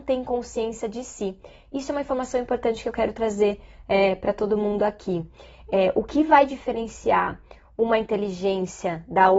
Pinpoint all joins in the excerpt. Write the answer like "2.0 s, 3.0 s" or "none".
none